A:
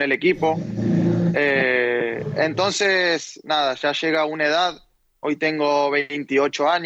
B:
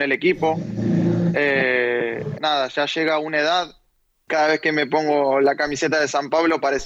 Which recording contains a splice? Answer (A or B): B